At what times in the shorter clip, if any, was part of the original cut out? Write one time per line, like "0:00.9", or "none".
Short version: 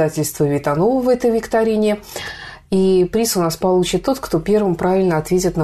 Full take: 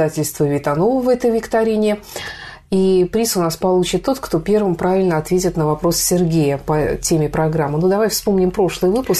none